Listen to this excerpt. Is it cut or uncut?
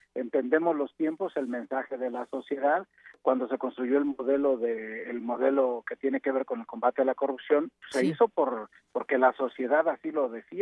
uncut